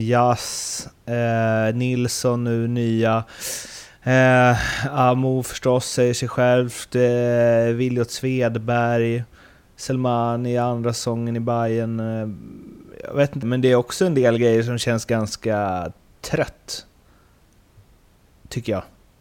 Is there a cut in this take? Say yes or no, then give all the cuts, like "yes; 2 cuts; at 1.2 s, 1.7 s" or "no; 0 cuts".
yes; 1 cut; at 13.4 s